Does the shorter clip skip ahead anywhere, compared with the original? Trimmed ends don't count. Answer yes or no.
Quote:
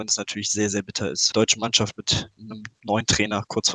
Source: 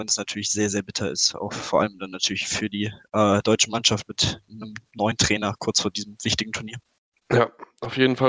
yes